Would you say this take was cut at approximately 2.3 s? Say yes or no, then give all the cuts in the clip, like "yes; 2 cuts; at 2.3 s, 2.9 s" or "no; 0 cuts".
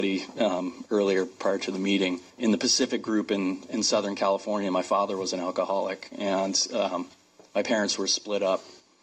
yes; 1 cut; at 2.3 s